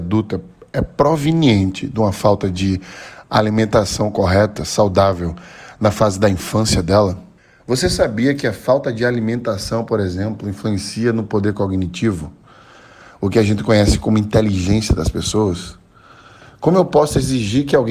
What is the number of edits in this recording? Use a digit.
0